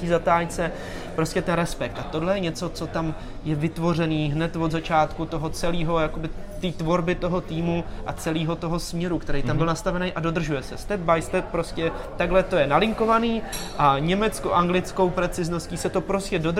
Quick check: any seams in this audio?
no; 0 cuts

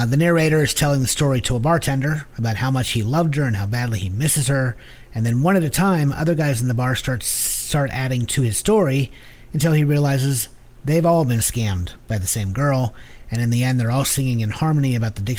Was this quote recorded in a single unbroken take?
yes; 0 cuts

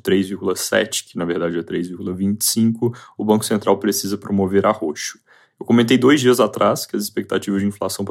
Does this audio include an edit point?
no; 0 cuts

